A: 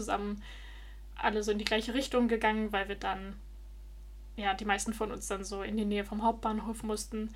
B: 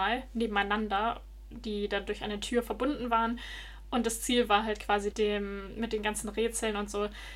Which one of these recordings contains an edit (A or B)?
B